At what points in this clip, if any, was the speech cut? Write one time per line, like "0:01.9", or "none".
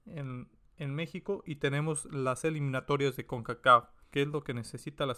0:04.1